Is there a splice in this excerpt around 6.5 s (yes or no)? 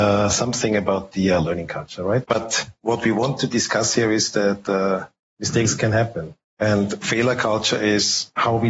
no